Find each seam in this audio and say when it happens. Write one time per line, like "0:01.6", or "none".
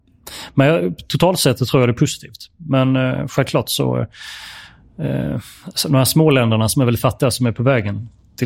none